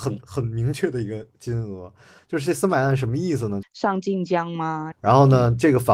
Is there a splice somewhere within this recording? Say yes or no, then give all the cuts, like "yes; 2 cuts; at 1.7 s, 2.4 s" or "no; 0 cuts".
yes; 2 cuts; at 3.6 s, 4.9 s